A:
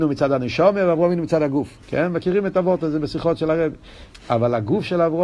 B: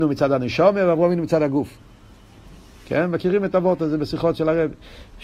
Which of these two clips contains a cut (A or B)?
A